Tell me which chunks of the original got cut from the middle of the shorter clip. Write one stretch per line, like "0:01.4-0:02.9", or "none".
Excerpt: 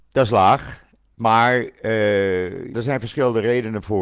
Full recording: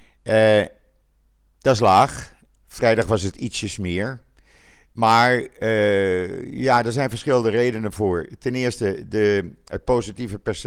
0:02.6-0:04.9
0:06.5-0:06.8